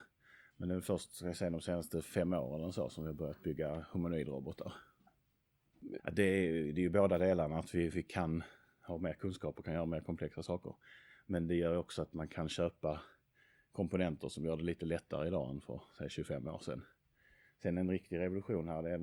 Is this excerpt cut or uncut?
cut